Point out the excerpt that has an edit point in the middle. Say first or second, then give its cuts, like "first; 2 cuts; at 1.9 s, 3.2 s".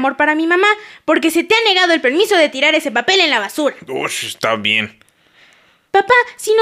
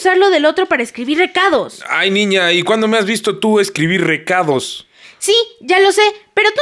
second; 1 cut; at 5.0 s